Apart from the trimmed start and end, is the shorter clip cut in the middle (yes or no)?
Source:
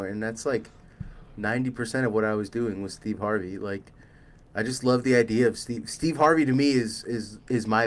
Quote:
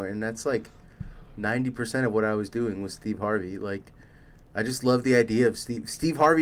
no